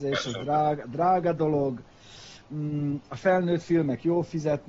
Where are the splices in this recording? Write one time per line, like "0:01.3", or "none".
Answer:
none